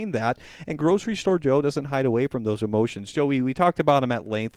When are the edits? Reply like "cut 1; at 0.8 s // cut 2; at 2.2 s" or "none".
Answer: none